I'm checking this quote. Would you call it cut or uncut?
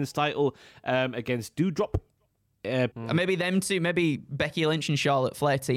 cut